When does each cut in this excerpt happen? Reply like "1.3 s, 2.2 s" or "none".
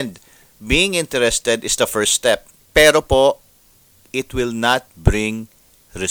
none